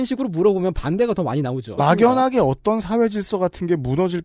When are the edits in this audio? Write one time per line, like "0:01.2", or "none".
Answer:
0:01.8